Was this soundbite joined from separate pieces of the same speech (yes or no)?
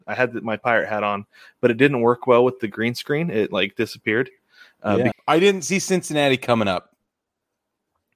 yes